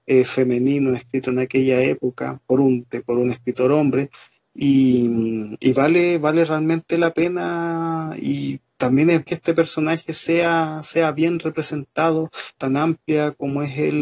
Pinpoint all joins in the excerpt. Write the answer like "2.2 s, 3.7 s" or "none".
2.9 s, 9.3 s, 12.6 s